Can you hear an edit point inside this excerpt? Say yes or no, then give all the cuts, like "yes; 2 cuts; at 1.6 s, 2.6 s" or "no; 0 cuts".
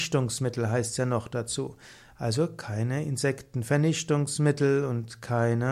no; 0 cuts